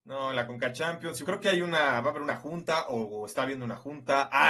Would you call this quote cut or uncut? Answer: cut